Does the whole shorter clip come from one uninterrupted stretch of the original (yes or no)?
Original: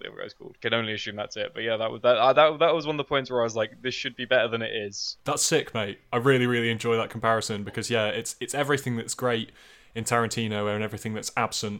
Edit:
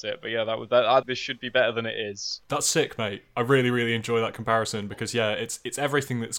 no